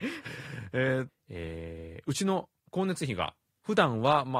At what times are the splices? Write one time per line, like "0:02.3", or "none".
0:01.1

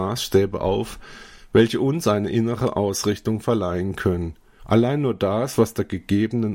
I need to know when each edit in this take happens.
0:04.6

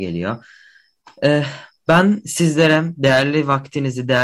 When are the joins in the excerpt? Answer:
none

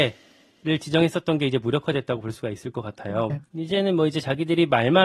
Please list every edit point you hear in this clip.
0:03.3

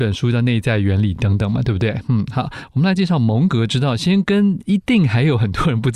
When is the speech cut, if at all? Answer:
none

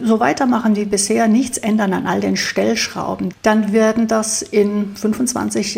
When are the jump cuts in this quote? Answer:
0:03.3

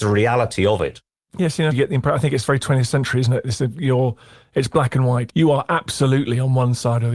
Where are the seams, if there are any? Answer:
0:01.7
0:05.3

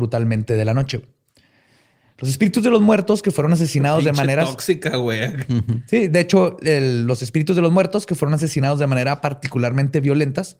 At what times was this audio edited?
none

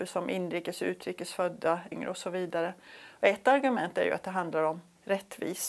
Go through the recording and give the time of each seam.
0:01.9

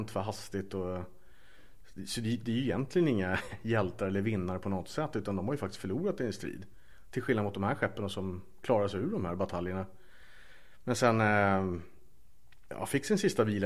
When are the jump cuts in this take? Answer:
none

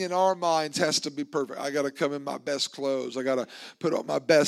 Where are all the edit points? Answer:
none

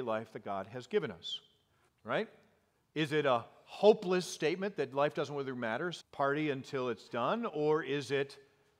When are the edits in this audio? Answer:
0:01.9
0:06.0

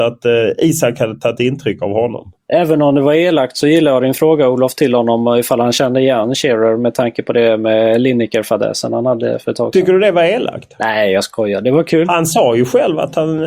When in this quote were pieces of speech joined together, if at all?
none

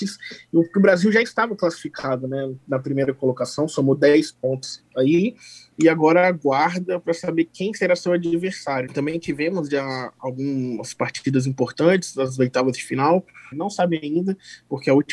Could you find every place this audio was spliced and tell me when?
0:08.9
0:13.5

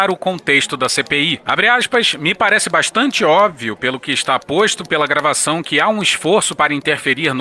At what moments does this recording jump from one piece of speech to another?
none

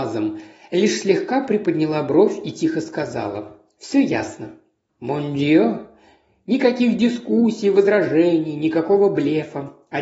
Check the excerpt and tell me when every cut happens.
0:04.9

